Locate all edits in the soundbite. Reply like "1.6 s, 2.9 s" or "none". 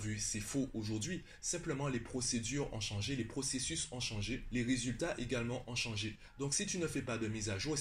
none